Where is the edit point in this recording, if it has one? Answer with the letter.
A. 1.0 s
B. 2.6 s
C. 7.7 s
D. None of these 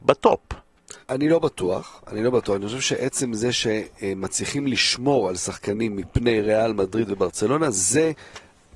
A